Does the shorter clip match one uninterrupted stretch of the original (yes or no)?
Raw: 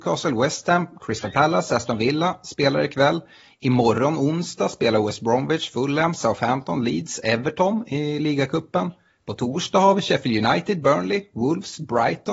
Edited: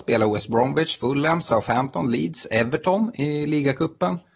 yes